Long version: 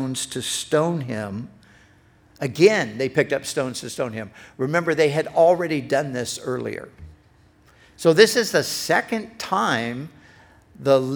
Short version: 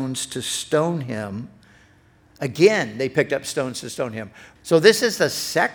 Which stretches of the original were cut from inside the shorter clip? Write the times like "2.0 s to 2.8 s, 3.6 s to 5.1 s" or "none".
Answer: 4.6 s to 7.9 s

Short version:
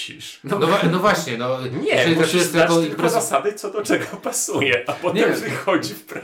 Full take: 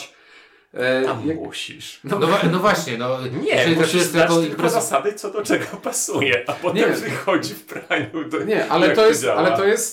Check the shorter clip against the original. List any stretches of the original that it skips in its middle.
none

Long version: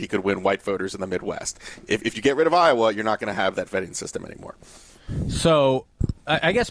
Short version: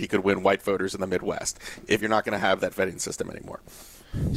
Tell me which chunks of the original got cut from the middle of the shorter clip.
2.0 s to 2.9 s

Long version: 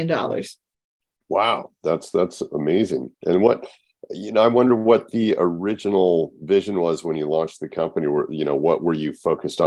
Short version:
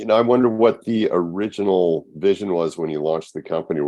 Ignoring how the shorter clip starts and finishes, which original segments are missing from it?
none

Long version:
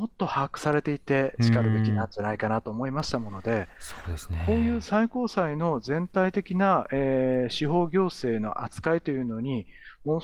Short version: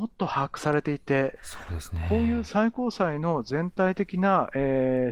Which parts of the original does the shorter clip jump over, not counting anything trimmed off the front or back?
1.4 s to 3.7 s

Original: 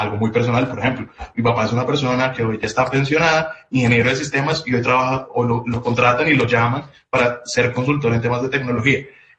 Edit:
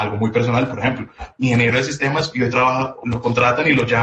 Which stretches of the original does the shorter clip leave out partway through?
1.3 s to 3.6 s, 5.4 s to 5.6 s

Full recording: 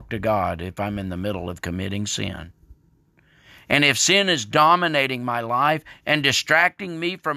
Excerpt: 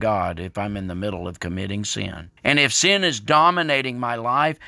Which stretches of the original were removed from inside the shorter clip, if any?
2.6 s to 3.6 s

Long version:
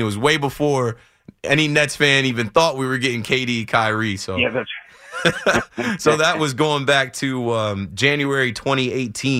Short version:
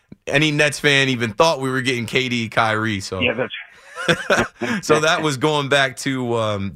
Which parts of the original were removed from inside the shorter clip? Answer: none

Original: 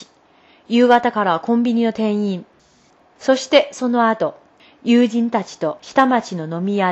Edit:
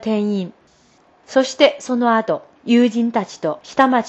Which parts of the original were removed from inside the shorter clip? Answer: 4.5 s to 4.7 s

